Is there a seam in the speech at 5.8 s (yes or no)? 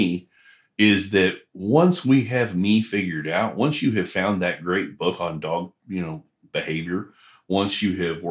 no